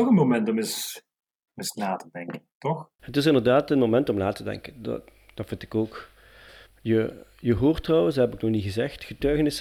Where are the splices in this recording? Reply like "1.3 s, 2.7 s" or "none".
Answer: 6.7 s